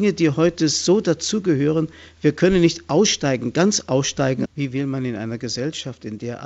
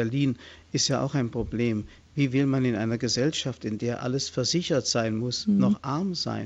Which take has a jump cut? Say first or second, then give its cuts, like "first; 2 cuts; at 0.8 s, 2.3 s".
first; 1 cut; at 4.5 s